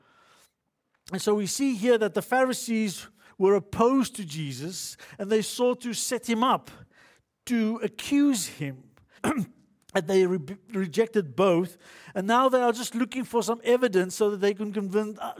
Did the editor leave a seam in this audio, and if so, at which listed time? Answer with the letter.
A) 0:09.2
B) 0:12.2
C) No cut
A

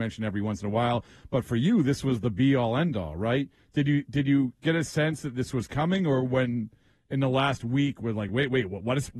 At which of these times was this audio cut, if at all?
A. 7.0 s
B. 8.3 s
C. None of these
C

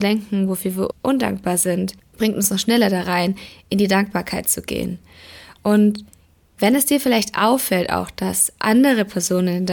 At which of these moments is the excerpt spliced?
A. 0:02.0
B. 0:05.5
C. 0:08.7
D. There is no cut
D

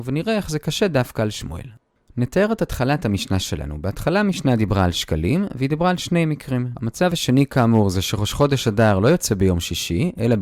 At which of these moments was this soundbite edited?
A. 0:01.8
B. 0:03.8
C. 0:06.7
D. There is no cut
C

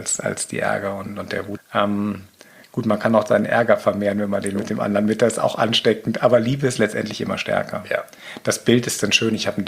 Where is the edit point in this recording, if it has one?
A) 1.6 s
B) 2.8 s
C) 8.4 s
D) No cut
A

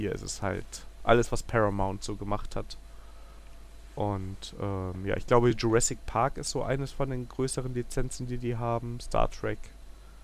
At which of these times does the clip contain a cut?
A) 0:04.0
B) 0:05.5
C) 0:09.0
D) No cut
D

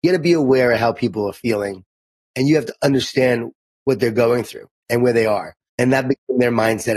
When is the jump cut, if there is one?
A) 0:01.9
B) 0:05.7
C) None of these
B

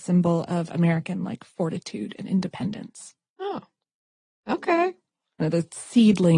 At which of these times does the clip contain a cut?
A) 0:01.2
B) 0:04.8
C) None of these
C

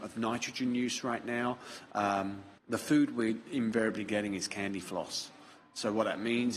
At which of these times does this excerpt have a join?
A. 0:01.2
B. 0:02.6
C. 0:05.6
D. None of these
B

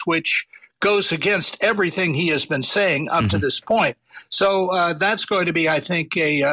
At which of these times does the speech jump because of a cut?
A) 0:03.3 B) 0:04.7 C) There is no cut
C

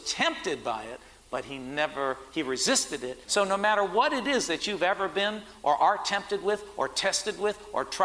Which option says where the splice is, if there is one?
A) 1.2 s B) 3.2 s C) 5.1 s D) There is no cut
B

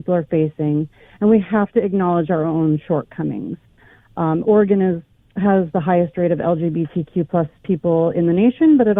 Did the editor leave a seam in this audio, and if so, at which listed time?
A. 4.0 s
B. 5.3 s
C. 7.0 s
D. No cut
D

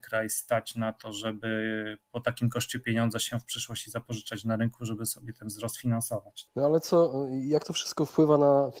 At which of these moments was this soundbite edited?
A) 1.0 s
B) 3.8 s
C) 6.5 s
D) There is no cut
C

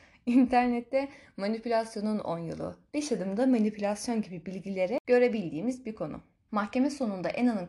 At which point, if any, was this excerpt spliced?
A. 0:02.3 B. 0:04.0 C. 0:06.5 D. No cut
C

